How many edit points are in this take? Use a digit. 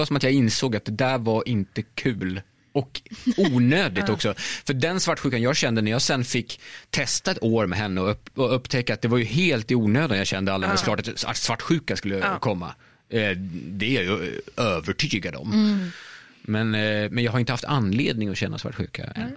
1